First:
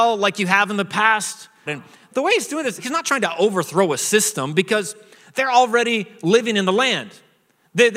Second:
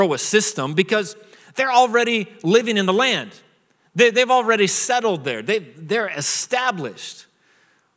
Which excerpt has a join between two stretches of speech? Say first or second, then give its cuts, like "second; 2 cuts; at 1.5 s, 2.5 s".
first; 2 cuts; at 1.7 s, 2.8 s